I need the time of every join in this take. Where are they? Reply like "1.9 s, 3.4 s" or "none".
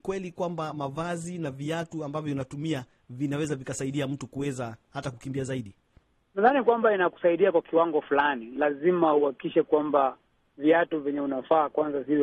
none